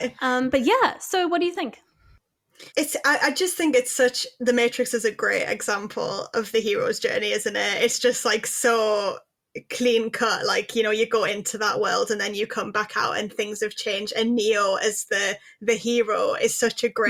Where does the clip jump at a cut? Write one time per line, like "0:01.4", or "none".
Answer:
0:02.7